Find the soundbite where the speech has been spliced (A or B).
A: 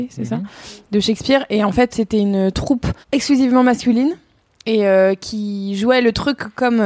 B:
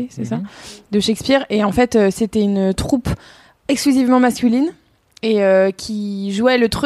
A